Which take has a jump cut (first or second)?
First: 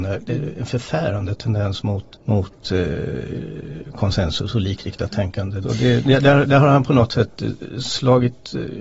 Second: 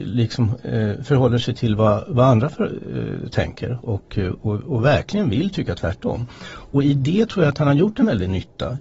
first